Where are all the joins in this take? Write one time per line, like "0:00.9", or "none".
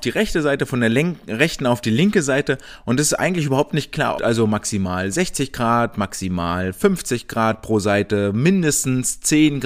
0:04.1